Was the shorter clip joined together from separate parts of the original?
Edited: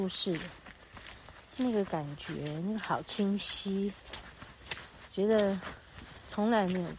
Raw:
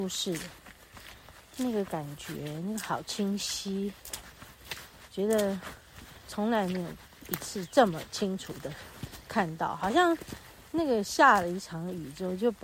no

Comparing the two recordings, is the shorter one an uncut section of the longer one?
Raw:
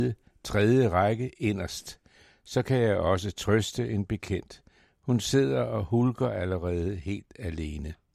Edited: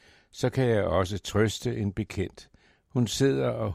yes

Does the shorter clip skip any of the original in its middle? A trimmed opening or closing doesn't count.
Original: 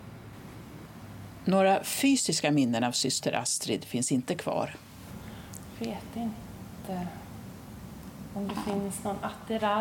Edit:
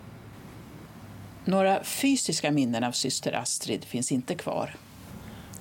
no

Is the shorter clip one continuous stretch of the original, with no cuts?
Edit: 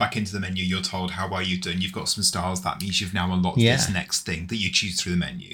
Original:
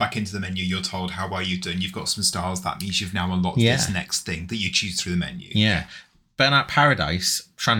yes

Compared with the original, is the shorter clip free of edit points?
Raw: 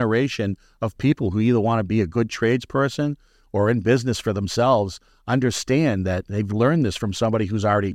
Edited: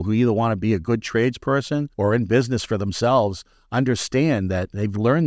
no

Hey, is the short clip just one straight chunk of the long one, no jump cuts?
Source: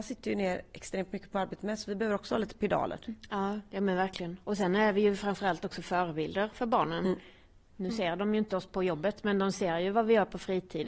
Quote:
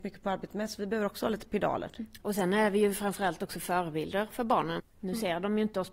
no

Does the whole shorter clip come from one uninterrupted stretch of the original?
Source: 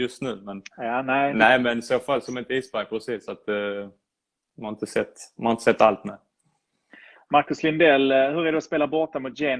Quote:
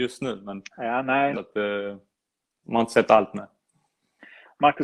no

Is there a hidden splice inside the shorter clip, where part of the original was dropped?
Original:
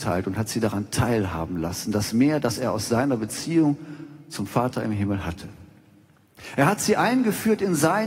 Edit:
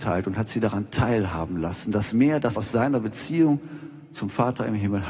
yes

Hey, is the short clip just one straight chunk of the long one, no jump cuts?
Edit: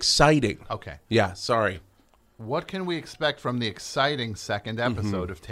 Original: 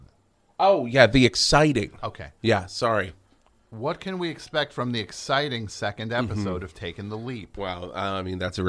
yes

